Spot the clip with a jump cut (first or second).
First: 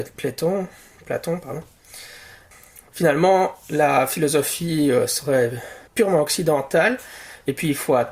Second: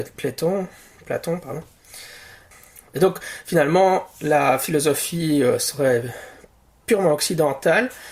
first